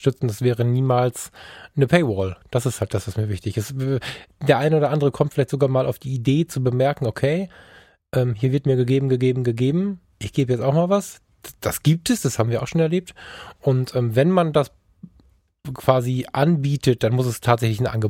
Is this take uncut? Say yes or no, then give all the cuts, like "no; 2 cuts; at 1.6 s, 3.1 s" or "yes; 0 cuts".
yes; 0 cuts